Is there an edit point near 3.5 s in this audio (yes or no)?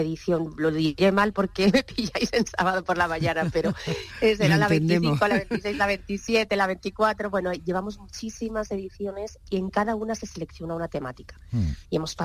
no